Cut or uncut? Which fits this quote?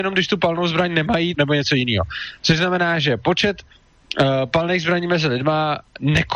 cut